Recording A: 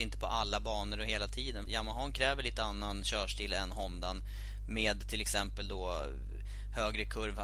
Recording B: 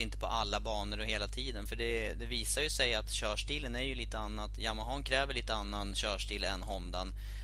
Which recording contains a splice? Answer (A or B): A